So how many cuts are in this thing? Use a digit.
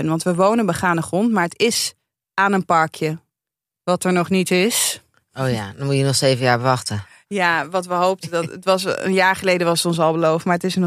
0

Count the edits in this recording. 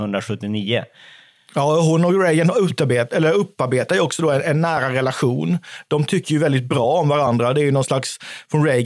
0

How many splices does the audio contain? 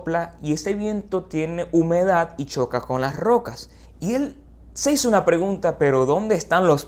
1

